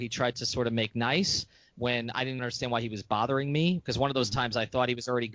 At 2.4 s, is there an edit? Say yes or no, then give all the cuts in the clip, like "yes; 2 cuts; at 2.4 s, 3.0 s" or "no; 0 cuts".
yes; 1 cut; at 2.4 s